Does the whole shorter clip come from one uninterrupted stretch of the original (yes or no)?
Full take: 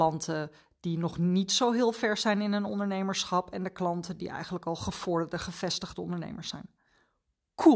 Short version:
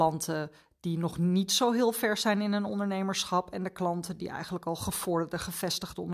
yes